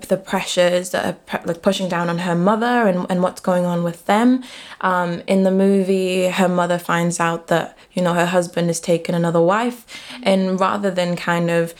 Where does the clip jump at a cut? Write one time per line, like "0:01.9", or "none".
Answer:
none